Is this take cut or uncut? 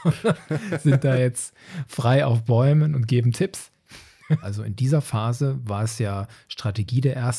cut